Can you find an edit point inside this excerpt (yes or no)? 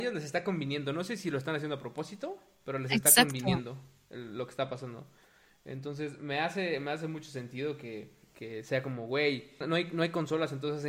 yes